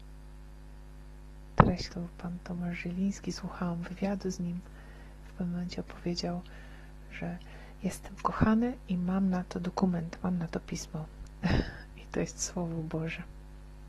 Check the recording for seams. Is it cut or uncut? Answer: cut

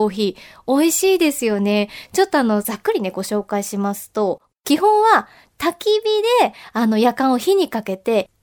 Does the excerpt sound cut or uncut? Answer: uncut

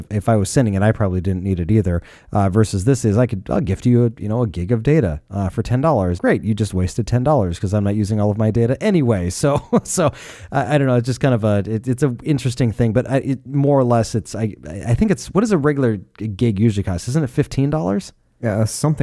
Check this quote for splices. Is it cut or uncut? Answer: cut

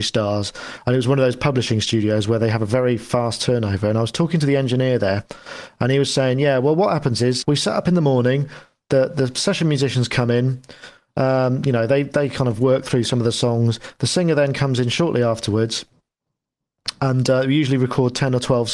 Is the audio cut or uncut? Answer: cut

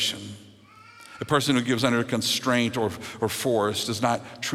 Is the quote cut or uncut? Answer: uncut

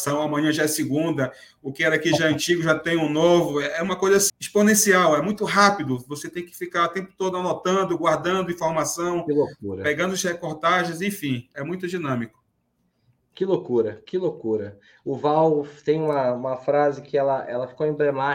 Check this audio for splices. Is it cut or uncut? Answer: cut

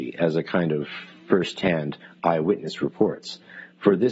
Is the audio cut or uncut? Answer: uncut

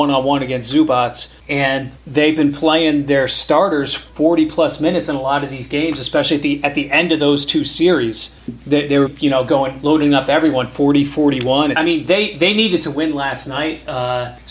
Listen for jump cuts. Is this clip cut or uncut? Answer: cut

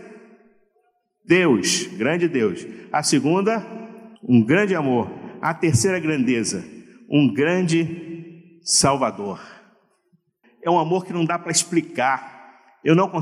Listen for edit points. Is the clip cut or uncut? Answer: cut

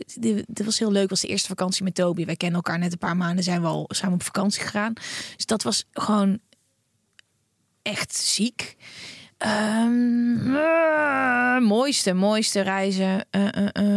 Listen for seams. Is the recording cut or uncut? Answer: uncut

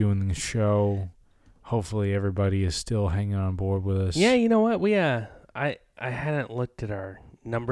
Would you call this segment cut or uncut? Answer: uncut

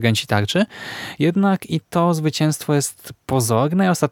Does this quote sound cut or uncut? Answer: uncut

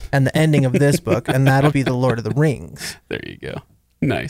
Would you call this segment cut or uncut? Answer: cut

